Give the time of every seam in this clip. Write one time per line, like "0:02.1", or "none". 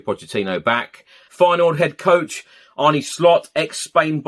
0:01.3